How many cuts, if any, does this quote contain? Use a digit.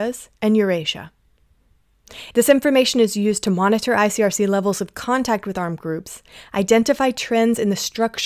1